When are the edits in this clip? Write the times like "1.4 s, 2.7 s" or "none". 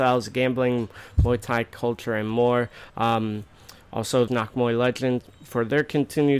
2.9 s, 4.3 s